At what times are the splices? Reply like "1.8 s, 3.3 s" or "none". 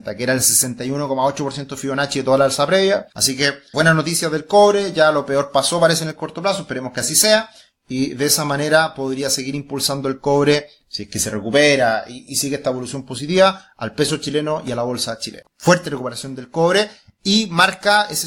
3.1 s, 15.4 s